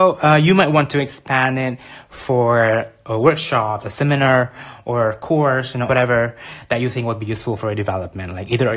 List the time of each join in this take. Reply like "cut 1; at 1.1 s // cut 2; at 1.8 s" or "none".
cut 1; at 3.8 s // cut 2; at 5.9 s